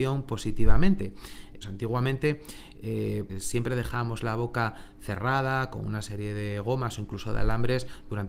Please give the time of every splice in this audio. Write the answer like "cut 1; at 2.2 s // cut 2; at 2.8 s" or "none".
cut 1; at 1.6 s // cut 2; at 3.3 s